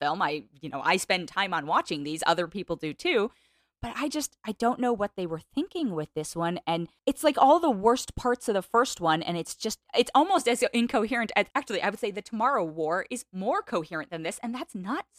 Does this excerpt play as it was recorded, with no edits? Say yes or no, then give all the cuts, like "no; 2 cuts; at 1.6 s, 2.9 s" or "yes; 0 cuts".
yes; 0 cuts